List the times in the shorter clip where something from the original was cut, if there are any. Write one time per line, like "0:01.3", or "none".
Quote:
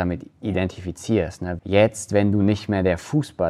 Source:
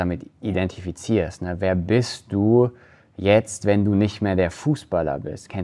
0:01.6